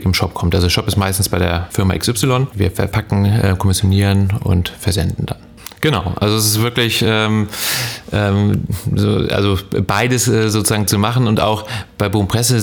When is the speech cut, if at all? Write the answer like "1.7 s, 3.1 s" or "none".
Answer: none